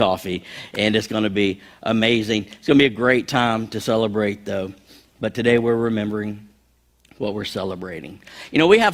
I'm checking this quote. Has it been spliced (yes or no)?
no